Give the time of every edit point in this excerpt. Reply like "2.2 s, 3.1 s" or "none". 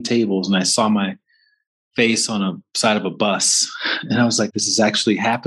4.5 s